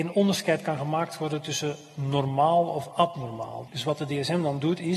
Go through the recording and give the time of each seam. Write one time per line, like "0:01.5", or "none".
0:03.7